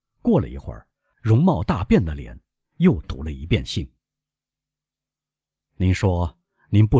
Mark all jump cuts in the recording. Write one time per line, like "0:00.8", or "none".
0:01.1